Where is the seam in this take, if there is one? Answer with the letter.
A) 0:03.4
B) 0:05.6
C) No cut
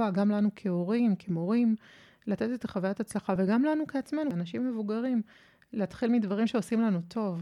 C